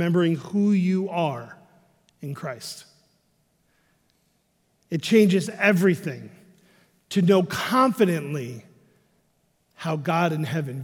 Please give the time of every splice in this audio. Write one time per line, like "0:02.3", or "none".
none